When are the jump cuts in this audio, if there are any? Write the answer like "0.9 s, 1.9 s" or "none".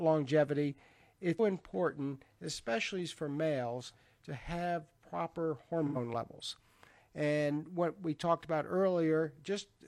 1.4 s